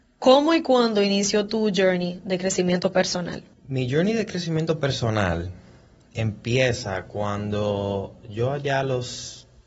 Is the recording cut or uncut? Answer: cut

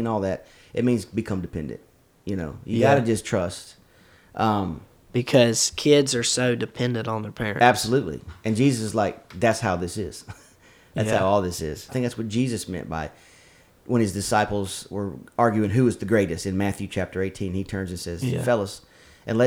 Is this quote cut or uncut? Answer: cut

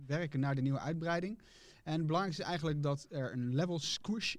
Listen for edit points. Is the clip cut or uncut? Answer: uncut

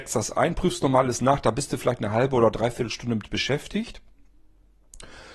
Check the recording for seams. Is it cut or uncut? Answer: uncut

